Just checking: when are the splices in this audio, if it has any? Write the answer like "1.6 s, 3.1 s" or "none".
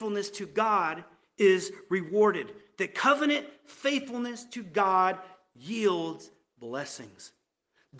none